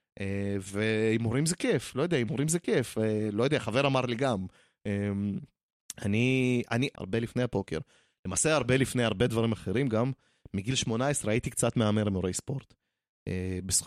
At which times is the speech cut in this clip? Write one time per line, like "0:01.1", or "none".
0:06.9